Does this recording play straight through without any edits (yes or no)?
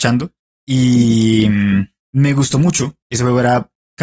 no